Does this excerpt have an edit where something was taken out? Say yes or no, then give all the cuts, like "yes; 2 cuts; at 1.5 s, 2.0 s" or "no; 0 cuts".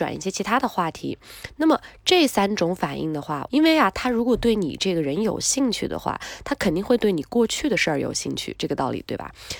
yes; 1 cut; at 3.5 s